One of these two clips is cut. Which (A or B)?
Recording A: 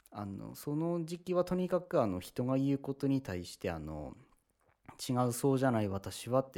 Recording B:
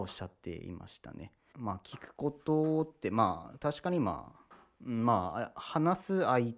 B